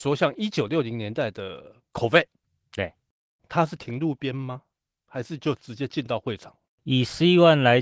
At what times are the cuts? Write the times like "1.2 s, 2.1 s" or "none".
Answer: none